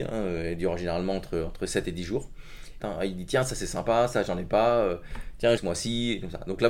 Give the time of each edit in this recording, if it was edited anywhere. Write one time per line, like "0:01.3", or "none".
0:02.8
0:05.6

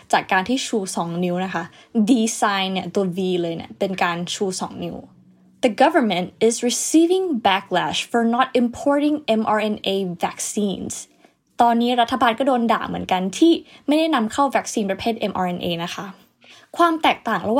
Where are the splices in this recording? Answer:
none

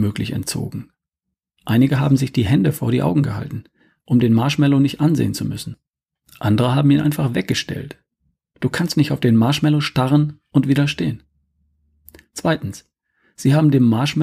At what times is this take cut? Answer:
none

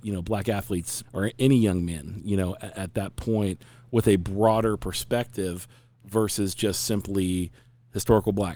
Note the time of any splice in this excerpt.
0:01.0

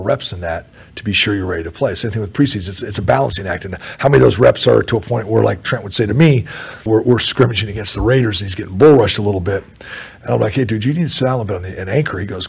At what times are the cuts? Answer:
0:06.9

